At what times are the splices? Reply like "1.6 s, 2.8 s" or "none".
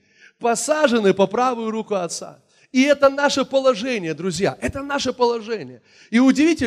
none